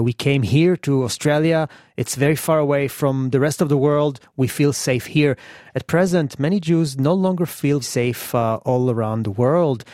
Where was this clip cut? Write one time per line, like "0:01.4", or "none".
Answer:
0:07.8